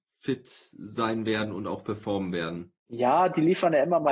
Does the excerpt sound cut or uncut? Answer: cut